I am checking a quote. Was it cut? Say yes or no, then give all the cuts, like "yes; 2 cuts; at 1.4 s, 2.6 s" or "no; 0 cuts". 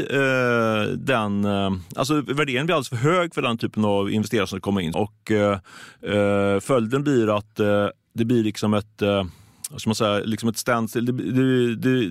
yes; 1 cut; at 4.9 s